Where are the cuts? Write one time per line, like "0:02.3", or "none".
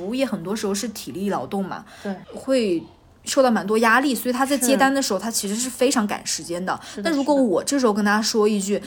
0:02.2